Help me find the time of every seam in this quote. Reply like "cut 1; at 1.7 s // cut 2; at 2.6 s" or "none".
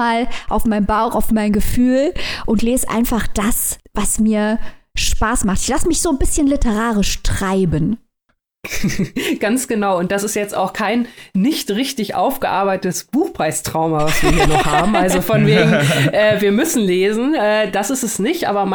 none